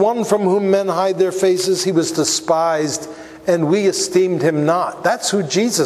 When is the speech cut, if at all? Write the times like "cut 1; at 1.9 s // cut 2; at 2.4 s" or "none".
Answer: none